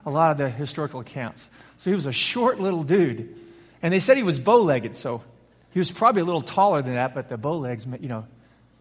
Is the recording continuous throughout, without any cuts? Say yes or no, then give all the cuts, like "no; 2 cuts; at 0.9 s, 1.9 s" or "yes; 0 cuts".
yes; 0 cuts